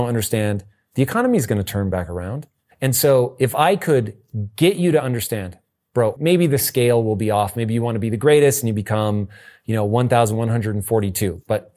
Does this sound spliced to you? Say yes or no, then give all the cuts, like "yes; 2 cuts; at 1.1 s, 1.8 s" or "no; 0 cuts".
yes; 2 cuts; at 2.7 s, 6.2 s